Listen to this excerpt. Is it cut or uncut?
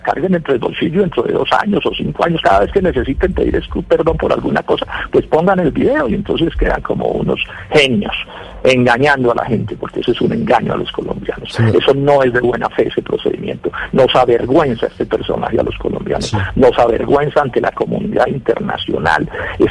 uncut